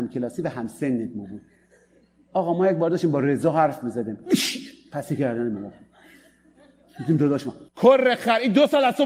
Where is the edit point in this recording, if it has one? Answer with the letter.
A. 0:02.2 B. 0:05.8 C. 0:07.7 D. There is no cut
C